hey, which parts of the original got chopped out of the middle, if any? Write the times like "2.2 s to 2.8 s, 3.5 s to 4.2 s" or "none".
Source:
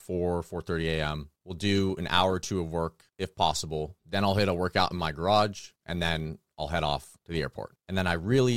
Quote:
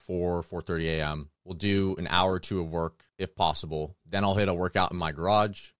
none